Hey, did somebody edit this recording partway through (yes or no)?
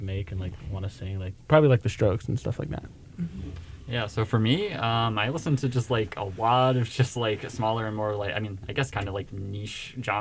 no